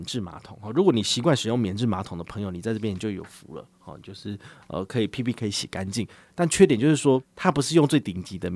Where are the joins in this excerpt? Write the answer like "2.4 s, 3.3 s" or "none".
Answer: none